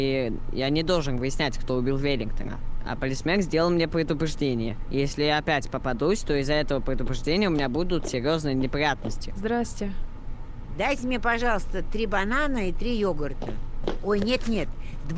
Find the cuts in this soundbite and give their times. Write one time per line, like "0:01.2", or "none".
none